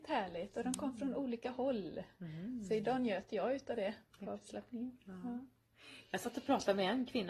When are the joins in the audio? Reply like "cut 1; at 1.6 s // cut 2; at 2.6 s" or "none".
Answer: none